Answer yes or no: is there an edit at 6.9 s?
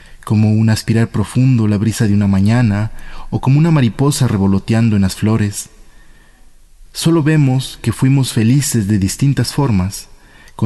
yes